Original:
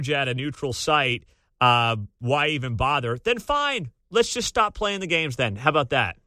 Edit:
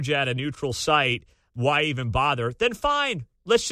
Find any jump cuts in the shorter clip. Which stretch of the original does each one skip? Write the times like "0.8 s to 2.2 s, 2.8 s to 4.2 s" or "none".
1.5 s to 2.2 s